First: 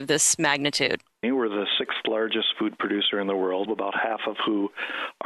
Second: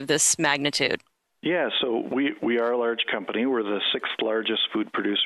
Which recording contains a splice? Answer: first; 2 cuts; at 1.2 s, 3.7 s

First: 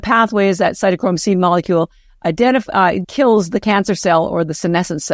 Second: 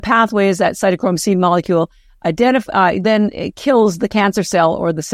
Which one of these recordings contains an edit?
first; 1 cut; at 3.0 s

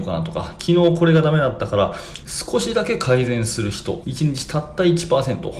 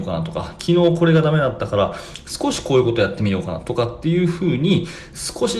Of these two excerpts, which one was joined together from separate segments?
first; 2 cuts; at 2.2 s, 4.0 s

